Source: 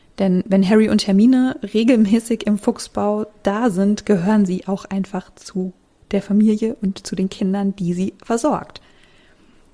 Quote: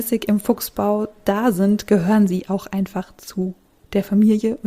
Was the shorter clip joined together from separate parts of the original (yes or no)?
no